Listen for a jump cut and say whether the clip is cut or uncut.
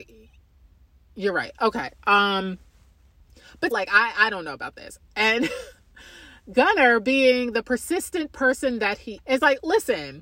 cut